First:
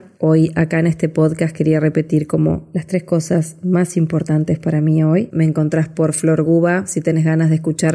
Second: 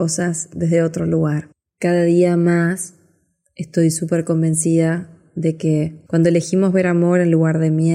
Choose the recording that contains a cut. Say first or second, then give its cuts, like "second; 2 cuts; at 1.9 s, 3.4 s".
first; 1 cut; at 5.3 s